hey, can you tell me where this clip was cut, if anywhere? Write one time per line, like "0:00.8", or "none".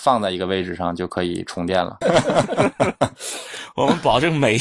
0:02.0